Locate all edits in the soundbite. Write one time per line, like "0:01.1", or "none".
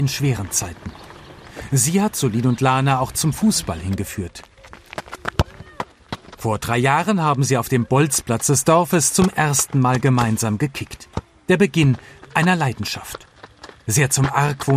none